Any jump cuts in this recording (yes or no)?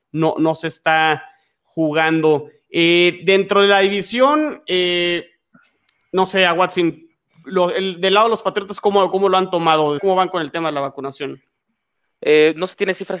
yes